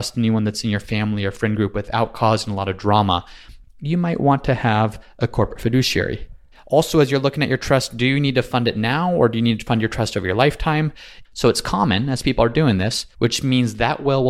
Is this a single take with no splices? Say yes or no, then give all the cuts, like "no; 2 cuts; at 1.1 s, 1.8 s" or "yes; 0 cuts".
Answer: no; 3 cuts; at 6.5 s, 11.2 s, 13.1 s